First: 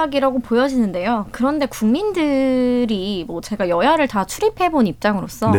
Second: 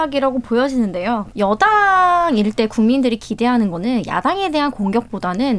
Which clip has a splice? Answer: second; 1 cut; at 1.3 s

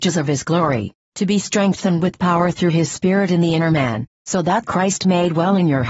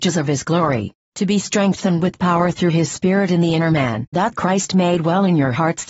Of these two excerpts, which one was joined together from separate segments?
second; 1 cut; at 4.1 s

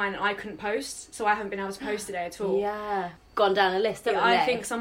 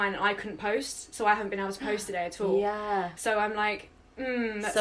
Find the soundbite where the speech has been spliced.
first; 1 cut; at 3.2 s

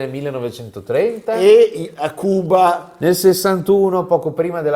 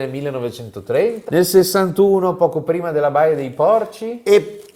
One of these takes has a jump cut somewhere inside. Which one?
second; 1 cut; at 1.3 s

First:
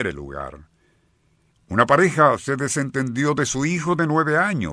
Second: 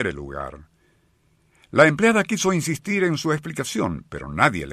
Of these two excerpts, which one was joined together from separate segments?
first; 1 cut; at 1.5 s

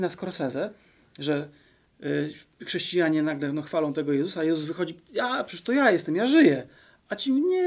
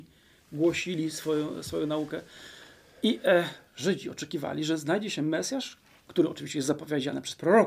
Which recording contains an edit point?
second; 1 cut; at 3.7 s

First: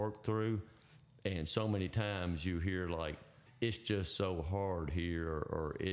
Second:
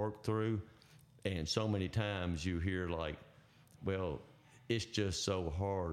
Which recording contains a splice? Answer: first; 1 cut; at 3.5 s

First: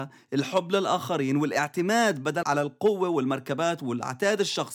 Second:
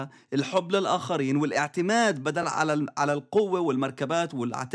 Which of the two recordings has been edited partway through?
first; 1 cut; at 2.4 s

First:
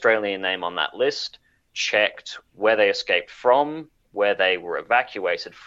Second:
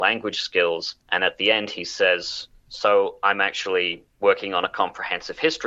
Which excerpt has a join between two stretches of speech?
second; 2 cuts; at 1.0 s, 4.1 s

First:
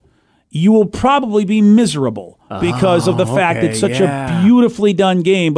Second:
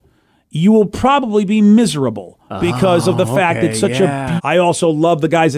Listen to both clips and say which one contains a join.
second; 1 cut; at 4.4 s

